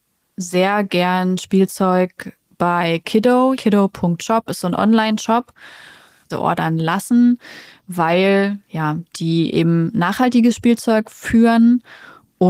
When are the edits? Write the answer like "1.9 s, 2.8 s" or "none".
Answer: 3.6 s, 6.3 s